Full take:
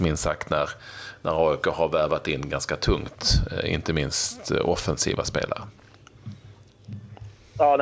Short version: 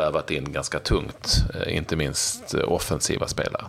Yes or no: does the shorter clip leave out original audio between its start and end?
no